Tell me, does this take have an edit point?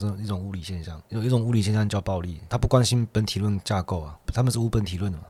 no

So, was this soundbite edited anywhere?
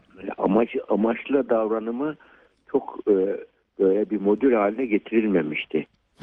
no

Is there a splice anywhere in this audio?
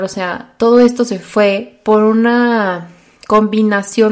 no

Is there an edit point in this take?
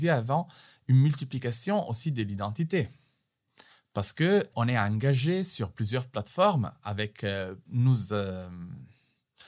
yes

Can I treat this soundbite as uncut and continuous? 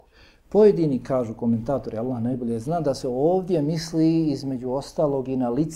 yes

